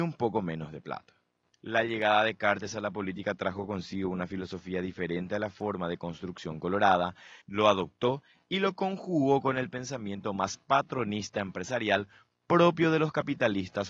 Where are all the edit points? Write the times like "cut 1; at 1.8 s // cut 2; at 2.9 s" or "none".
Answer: cut 1; at 7.4 s